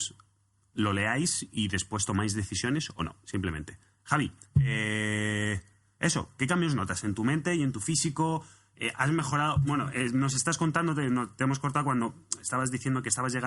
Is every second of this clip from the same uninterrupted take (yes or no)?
yes